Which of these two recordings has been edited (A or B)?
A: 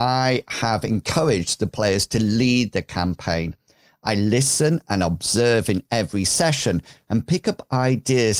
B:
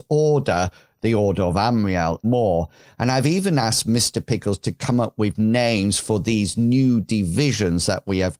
B